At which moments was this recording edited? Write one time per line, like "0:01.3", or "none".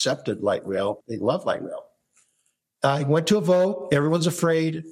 0:01.0